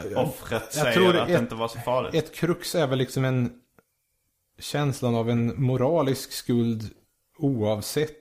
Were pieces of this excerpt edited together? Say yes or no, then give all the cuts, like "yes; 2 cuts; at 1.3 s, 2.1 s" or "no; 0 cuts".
no; 0 cuts